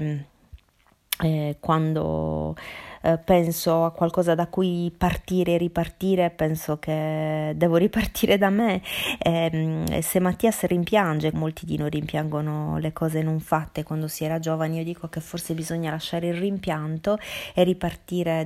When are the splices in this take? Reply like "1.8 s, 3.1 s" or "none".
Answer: 11.3 s